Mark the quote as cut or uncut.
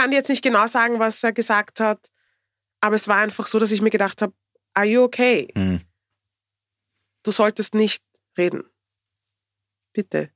uncut